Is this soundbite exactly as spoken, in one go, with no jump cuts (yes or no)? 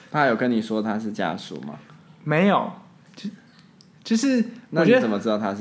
yes